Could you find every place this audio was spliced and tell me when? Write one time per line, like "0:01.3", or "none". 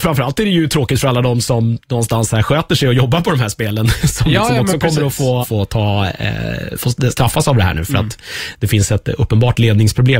0:05.4